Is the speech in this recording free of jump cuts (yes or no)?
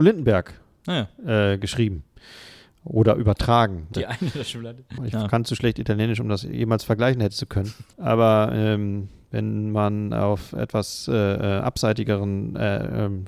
no